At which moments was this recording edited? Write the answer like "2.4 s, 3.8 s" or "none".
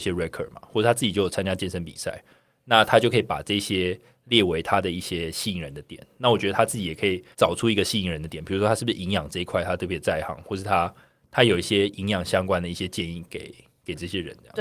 7.3 s